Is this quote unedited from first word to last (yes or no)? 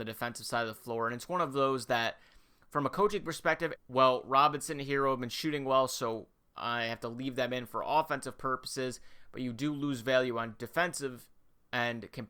no